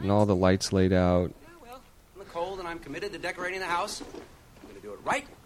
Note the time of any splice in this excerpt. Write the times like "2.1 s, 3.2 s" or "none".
2.1 s